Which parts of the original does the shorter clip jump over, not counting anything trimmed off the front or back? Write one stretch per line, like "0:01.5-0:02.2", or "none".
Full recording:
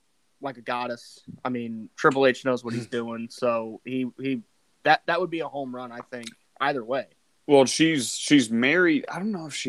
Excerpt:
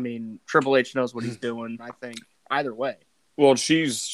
0:03.3-0:05.9